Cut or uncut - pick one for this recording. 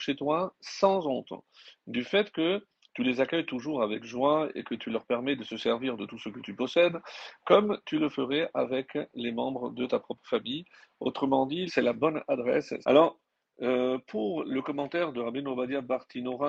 cut